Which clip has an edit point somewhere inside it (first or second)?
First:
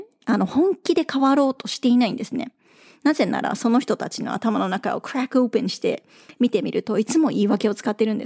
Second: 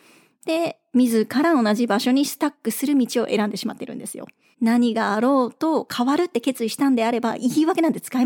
second